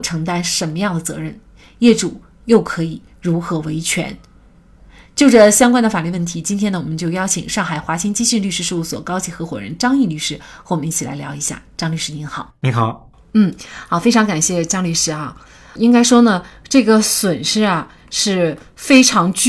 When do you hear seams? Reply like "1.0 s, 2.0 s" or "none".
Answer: none